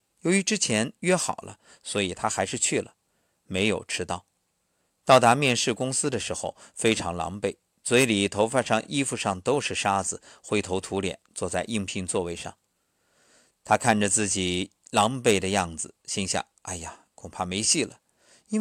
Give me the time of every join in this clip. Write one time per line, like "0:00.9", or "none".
none